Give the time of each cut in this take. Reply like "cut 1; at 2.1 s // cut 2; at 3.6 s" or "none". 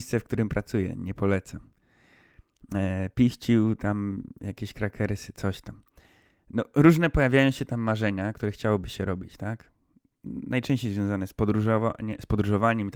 none